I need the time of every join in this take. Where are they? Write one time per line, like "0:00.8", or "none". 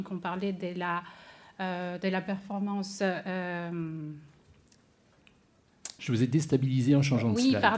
0:06.0

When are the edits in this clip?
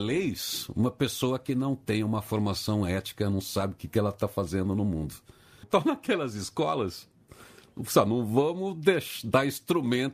0:05.6

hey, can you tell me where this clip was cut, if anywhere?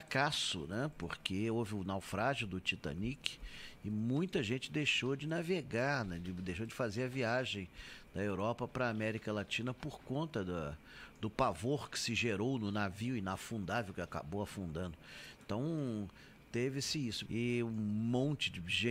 0:17.2

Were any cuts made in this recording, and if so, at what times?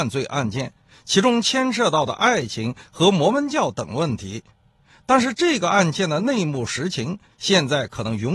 none

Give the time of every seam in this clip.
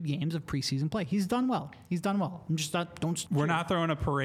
0:03.3

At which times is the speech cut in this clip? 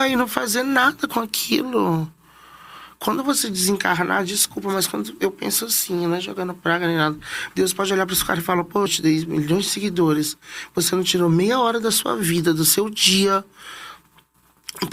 0:07.5
0:08.9

